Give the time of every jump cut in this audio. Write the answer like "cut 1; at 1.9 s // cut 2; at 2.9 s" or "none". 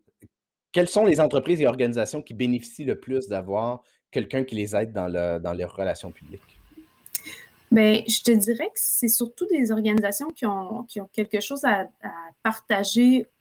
none